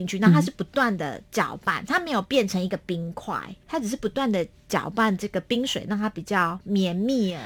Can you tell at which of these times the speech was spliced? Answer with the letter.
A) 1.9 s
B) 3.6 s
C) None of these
B